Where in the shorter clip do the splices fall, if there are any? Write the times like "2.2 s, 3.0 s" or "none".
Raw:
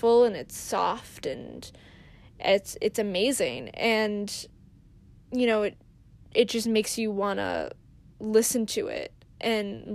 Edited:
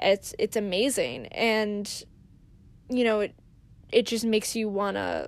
none